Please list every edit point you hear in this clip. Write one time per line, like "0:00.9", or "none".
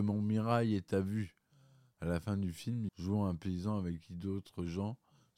0:02.9